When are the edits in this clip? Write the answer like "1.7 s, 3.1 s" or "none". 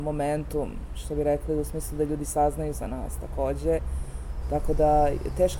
4.4 s

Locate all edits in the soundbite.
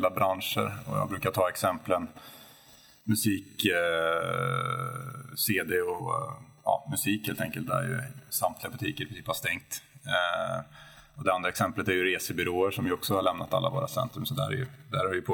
6.0 s

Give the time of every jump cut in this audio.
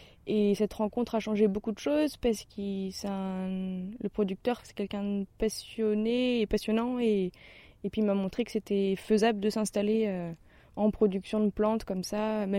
4.6 s

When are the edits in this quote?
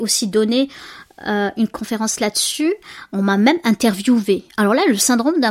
none

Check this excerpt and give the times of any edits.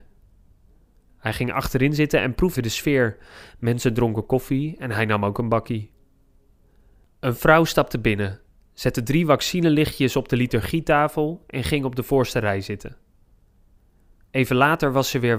2.6 s

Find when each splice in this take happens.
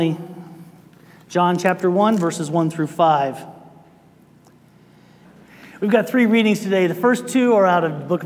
5.2 s

